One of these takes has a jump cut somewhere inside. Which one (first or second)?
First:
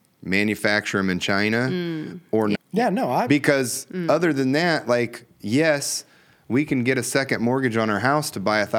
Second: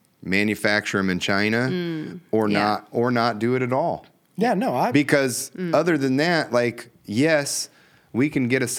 first